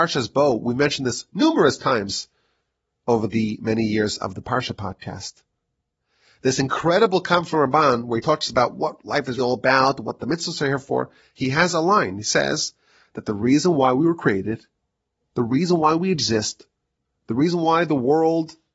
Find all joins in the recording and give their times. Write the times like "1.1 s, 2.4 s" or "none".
9.4 s